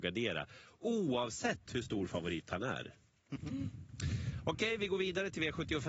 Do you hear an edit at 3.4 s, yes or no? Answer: yes